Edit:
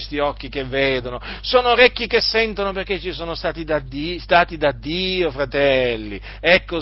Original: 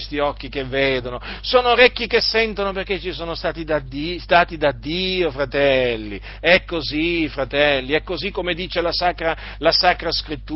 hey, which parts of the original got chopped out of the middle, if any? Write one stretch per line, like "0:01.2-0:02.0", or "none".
none